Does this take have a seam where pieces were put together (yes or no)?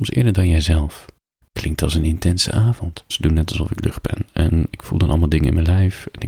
yes